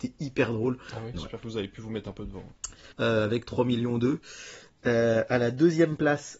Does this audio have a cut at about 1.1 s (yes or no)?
yes